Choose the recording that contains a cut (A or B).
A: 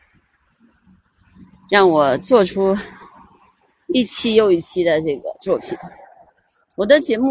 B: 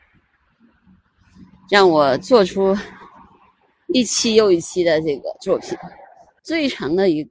B